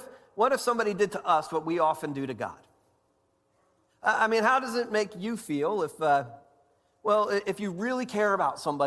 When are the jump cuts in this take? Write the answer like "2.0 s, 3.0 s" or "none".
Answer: none